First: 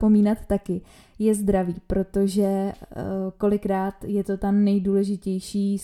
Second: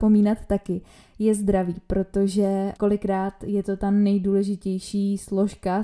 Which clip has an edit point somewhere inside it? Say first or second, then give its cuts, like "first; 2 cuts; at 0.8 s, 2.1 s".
second; 1 cut; at 2.7 s